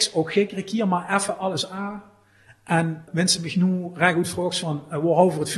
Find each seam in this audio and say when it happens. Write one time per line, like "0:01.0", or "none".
0:03.1